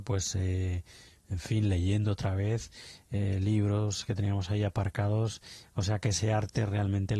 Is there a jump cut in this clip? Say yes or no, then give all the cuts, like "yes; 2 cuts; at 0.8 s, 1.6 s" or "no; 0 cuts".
no; 0 cuts